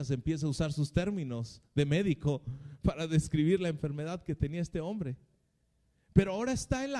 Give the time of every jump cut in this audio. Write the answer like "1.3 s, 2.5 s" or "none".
none